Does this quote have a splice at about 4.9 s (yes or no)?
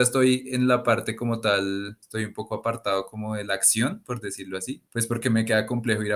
yes